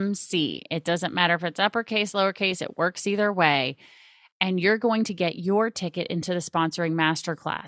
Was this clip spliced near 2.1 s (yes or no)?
no